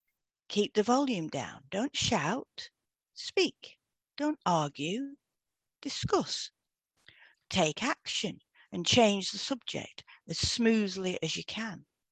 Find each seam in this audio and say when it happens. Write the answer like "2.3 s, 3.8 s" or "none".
7.3 s